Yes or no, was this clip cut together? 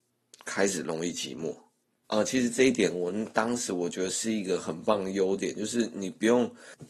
yes